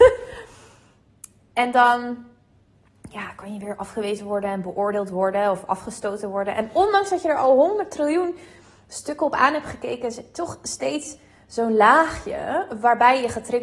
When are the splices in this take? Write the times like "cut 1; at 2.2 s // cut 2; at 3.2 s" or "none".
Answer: none